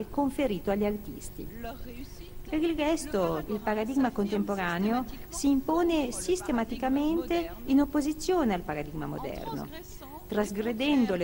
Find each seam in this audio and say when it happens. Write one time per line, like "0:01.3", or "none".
0:02.4
0:03.5